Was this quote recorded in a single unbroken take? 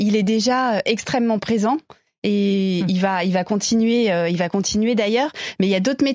yes; 0 cuts

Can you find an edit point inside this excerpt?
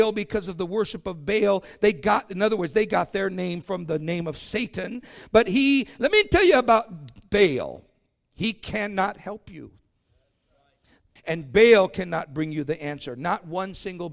yes; 1 cut; at 11.2 s

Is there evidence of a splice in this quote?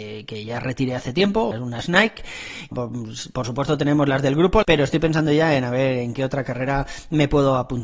yes; 3 cuts; at 1.5 s, 2.7 s, 4.6 s

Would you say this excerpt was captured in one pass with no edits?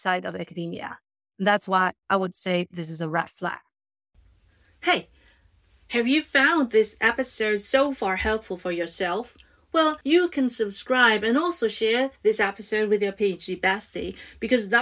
no; 1 cut; at 10.0 s

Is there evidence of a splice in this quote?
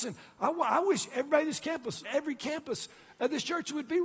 yes; 1 cut; at 2.0 s

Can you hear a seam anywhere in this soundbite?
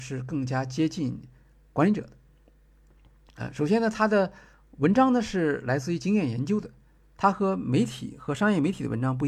no; 0 cuts

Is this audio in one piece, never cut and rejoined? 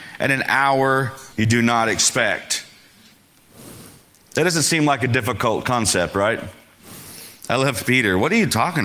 no; 1 cut; at 1.3 s

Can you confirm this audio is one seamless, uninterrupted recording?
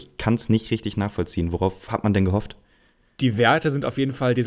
yes; 0 cuts

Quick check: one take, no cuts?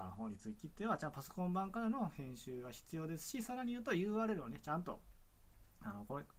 yes; 0 cuts

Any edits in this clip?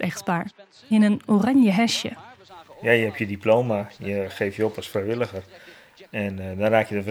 no; 0 cuts

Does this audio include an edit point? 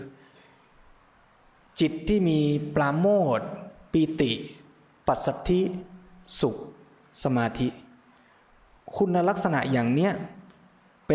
no; 0 cuts

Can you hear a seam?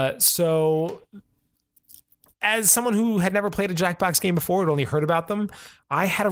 no; 0 cuts

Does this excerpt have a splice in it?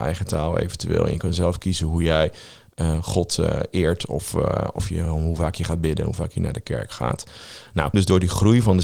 yes; 1 cut; at 7.9 s

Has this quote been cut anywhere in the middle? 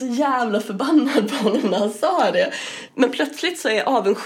yes; 1 cut; at 2.9 s

